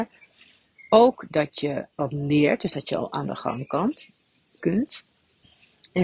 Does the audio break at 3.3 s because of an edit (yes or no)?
no